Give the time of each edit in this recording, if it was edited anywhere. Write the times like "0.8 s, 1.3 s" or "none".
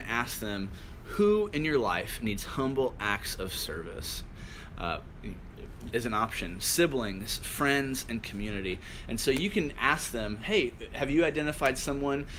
4.7 s, 5.9 s